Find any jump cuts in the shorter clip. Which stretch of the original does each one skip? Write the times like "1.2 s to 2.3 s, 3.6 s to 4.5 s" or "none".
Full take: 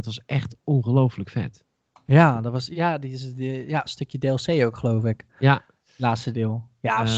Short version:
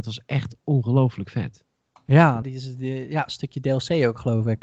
2.4 s to 3.0 s